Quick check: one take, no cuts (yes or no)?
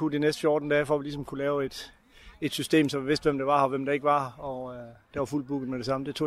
yes